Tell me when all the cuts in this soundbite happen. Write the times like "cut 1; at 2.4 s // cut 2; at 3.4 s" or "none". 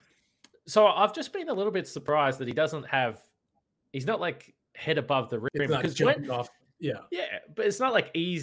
none

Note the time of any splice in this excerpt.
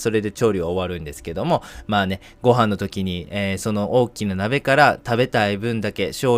none

